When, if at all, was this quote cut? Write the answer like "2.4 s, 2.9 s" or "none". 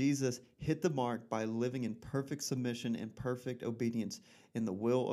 none